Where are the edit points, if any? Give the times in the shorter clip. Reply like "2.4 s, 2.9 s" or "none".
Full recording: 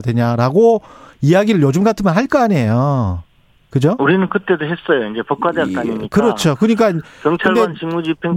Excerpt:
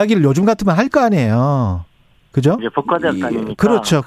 2.6 s